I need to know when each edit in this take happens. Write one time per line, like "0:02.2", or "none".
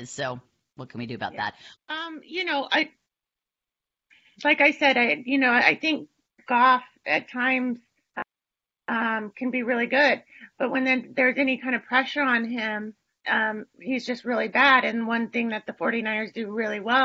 0:01.7